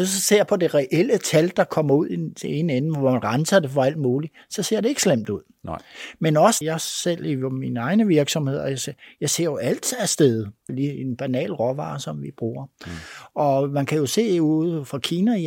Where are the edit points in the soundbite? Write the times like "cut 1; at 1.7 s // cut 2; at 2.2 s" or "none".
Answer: cut 1; at 6.6 s // cut 2; at 10.7 s